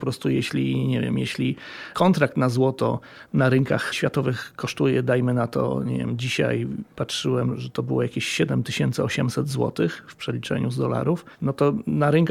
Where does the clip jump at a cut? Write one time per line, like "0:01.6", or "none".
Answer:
0:11.3

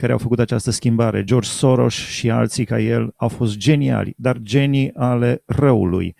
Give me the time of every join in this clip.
none

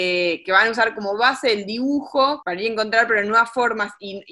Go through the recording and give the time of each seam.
0:02.4

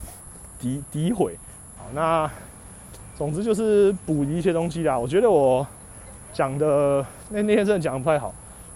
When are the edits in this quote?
0:01.8

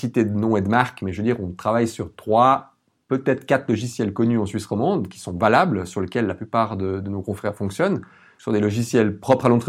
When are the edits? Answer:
none

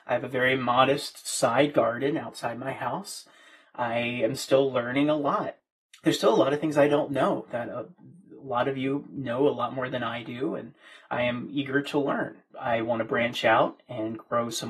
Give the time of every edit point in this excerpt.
0:12.5

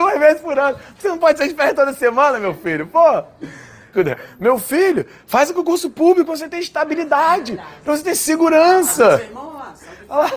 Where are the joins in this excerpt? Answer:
0:03.9

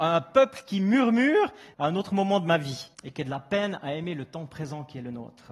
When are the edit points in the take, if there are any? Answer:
0:01.7
0:02.9

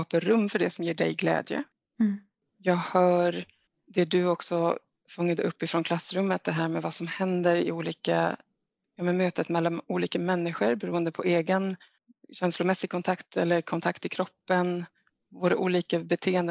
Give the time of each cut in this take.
none

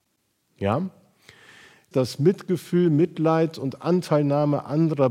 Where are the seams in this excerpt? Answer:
0:01.9

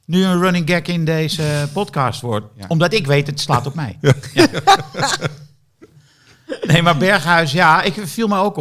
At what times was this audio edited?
none

